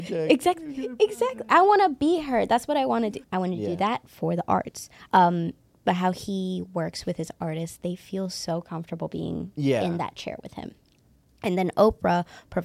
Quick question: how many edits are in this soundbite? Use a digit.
2